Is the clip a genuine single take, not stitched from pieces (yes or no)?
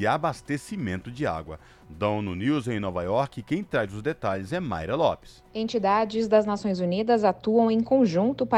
yes